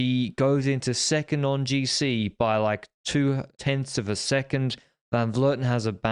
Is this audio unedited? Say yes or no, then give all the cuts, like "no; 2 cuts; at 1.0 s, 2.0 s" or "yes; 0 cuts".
no; 1 cut; at 3.5 s